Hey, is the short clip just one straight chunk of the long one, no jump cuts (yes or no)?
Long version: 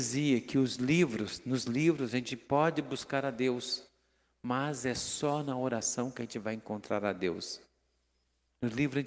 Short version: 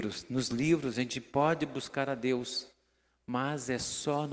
yes